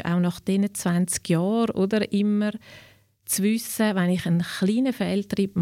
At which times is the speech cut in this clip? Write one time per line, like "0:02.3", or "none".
none